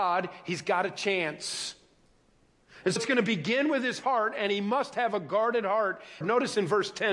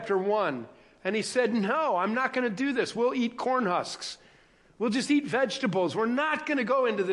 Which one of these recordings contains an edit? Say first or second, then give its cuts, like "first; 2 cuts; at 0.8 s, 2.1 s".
first; 2 cuts; at 3.0 s, 6.2 s